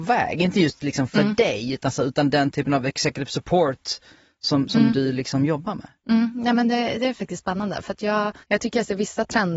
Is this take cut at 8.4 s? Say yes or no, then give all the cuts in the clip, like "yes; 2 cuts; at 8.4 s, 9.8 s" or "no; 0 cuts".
yes; 1 cut; at 8.4 s